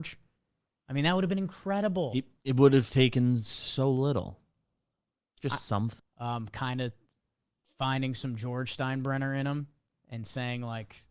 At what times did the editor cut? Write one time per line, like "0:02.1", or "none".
0:06.0